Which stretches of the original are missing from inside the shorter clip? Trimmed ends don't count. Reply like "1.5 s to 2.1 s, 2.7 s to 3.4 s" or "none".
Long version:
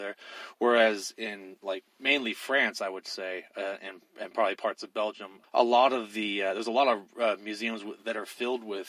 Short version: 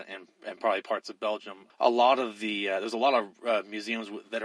none